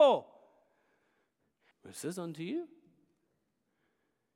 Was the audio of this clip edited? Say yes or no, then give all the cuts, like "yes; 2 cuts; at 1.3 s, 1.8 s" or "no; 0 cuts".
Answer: yes; 1 cut; at 1.7 s